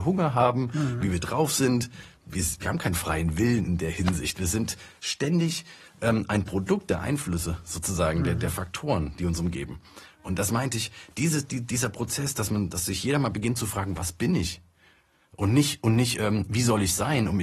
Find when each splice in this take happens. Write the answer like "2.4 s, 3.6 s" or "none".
none